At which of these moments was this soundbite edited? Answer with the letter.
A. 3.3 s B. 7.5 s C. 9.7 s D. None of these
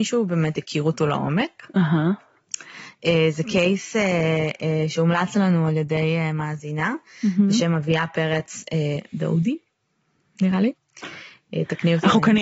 D